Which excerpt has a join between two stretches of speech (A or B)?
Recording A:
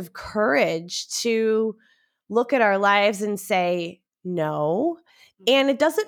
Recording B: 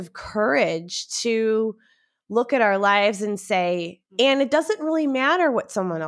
B